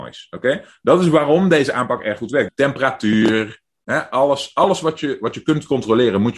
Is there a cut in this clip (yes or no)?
yes